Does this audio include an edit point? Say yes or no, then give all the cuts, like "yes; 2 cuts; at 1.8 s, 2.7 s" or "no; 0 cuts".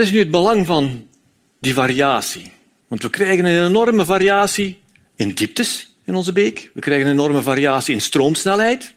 no; 0 cuts